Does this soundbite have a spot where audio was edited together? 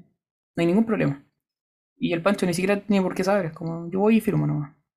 no; 0 cuts

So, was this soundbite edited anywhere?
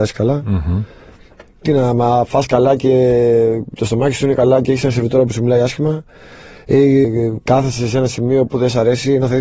yes; 1 cut; at 7.0 s

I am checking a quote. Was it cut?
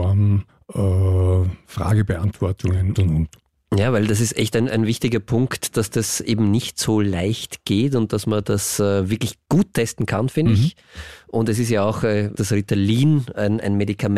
yes; 2 cuts; at 2.9 s, 12.3 s

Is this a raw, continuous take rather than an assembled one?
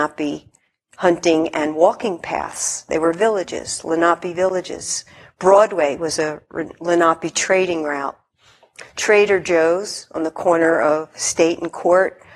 yes; 0 cuts

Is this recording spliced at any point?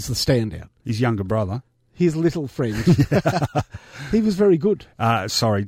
no; 0 cuts

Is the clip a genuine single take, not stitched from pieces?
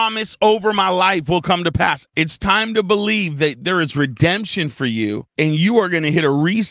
no; 2 cuts; at 2.1 s, 5.3 s

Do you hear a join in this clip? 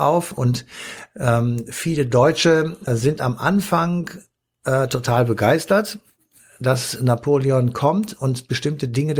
yes; 1 cut; at 2.9 s

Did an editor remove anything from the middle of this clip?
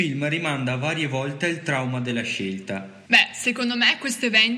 yes; 1 cut; at 3.1 s

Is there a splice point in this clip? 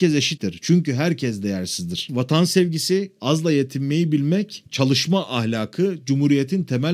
yes; 2 cuts; at 2.1 s, 3.2 s

